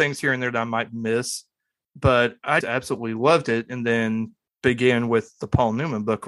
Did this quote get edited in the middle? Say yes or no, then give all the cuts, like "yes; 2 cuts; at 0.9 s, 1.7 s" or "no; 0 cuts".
yes; 1 cut; at 2.6 s